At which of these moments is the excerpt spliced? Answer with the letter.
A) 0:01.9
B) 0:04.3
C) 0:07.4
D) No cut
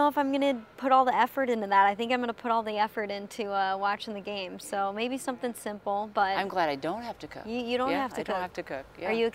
D